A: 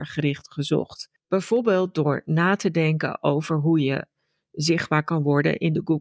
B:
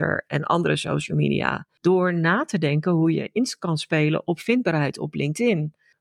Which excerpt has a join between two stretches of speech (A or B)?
A